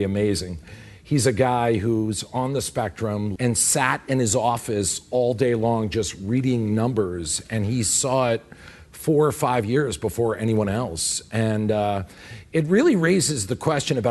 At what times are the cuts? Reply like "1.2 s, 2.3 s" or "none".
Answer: 3.4 s